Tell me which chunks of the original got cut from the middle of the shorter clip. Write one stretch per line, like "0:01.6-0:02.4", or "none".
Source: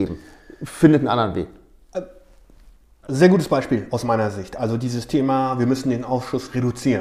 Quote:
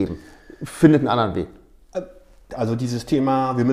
0:02.5-0:04.5